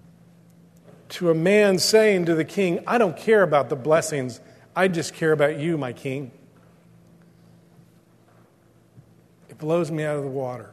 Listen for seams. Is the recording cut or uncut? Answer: uncut